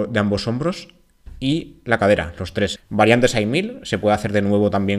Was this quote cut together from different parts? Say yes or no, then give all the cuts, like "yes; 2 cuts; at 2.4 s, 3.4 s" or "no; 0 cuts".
yes; 1 cut; at 2.8 s